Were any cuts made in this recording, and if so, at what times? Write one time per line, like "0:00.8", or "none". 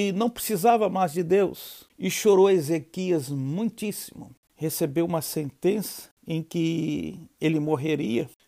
0:01.9
0:04.5